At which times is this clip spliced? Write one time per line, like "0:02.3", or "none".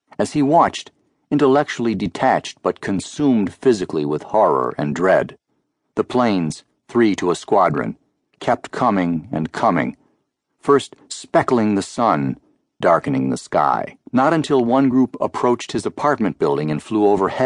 0:12.8
0:14.1